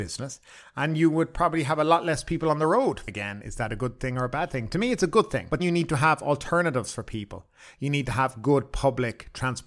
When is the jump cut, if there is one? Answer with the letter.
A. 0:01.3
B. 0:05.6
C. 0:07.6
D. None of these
B